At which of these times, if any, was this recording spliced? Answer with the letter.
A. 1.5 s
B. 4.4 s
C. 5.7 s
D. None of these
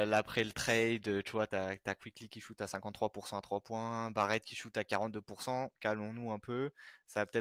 A